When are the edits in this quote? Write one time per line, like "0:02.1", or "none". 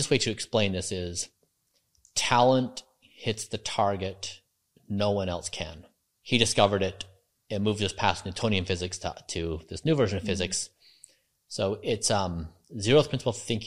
0:06.1